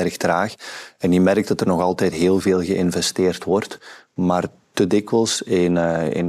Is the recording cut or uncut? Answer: uncut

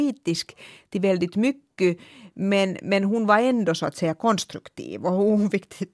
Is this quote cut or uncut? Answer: uncut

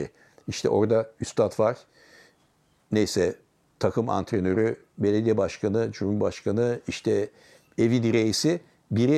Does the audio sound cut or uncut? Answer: uncut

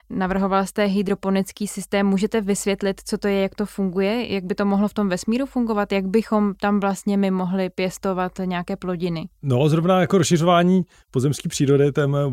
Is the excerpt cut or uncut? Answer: uncut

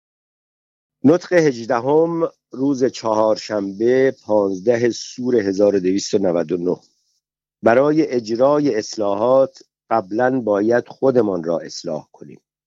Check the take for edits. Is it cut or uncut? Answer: uncut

